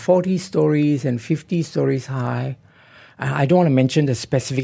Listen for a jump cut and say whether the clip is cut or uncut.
uncut